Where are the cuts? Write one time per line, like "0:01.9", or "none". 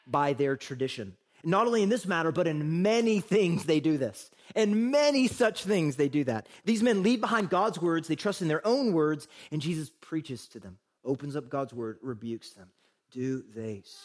none